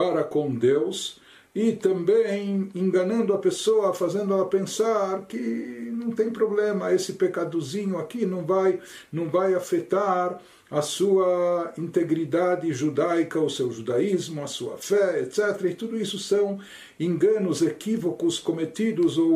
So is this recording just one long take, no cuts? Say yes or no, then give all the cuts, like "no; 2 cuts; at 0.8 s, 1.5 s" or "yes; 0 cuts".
yes; 0 cuts